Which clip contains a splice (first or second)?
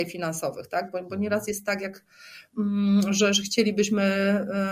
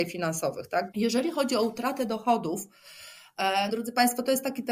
second